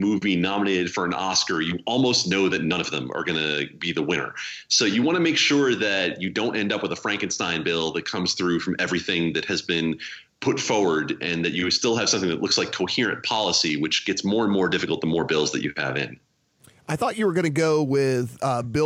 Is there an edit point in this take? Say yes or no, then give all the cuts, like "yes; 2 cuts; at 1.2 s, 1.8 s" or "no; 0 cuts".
no; 0 cuts